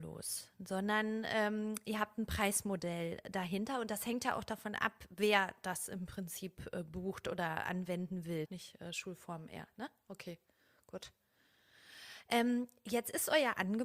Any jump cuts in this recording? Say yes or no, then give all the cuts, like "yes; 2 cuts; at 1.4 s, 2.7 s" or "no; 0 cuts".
yes; 1 cut; at 8.5 s